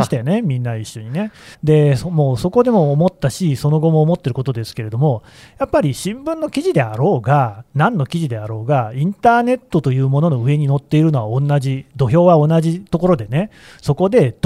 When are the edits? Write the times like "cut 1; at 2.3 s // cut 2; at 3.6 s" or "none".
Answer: cut 1; at 1.5 s